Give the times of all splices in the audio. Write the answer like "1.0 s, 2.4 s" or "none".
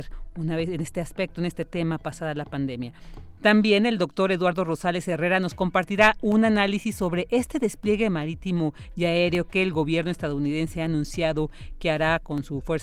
3.4 s